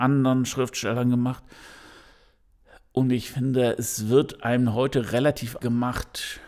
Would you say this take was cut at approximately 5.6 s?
yes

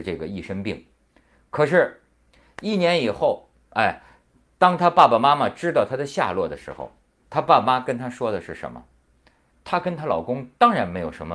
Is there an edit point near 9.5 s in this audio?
yes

